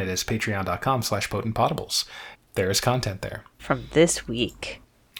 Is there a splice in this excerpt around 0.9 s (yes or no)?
no